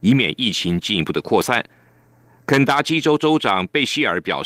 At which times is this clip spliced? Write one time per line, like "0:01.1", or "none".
0:02.4